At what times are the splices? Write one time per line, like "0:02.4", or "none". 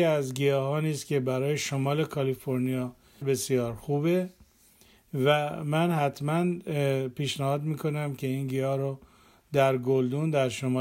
0:03.2